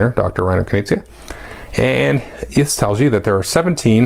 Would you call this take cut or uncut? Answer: uncut